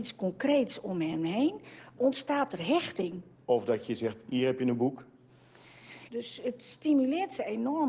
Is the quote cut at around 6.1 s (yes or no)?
yes